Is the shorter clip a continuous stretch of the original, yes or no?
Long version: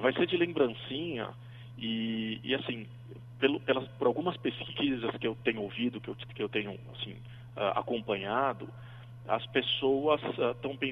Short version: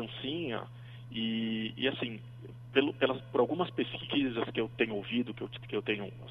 yes